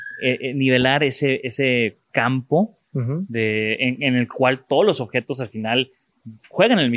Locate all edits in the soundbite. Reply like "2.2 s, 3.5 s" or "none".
none